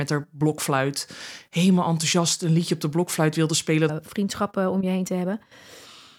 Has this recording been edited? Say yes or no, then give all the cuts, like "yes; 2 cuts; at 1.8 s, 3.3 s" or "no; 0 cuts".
yes; 1 cut; at 3.9 s